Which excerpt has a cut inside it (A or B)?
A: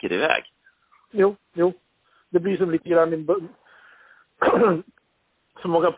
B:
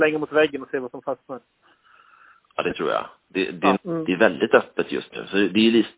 B